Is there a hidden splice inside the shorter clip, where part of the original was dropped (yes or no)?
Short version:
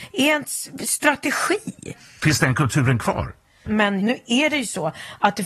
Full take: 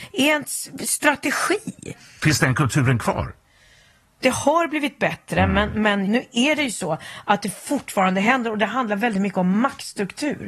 yes